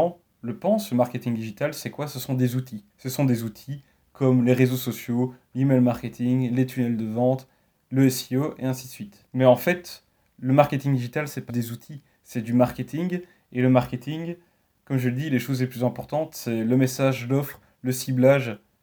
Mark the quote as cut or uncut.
cut